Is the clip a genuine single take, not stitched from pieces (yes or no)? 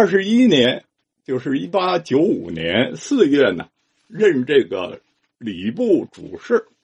yes